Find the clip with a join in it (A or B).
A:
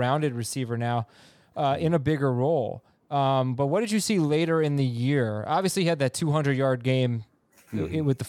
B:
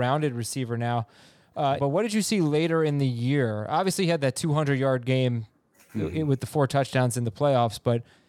B